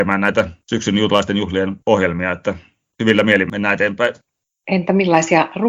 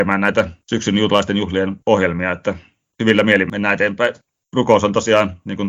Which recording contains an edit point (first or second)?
second